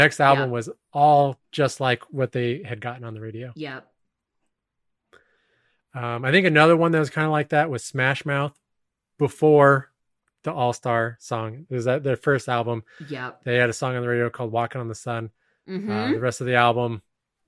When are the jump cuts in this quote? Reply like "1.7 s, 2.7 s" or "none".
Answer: none